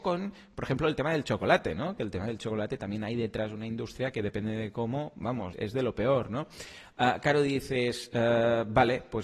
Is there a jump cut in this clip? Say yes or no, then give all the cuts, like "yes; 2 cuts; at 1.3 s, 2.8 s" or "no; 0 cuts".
yes; 1 cut; at 5.5 s